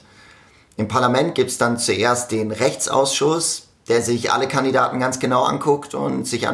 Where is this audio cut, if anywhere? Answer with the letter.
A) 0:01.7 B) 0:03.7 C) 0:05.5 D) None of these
D